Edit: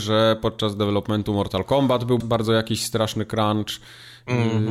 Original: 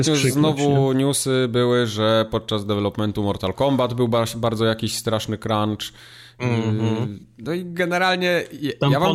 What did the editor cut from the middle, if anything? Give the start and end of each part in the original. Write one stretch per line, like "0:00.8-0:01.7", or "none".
0:04.1-0:04.3